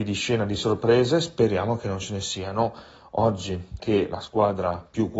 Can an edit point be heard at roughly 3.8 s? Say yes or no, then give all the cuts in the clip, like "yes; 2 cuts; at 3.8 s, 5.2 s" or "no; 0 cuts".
yes; 1 cut; at 3.8 s